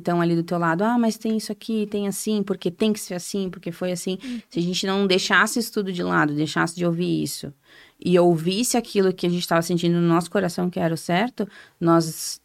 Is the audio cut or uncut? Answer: uncut